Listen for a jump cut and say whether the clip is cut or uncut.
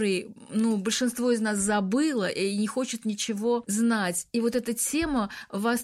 uncut